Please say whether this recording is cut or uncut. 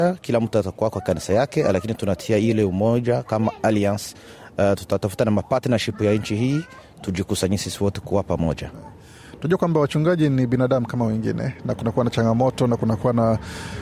uncut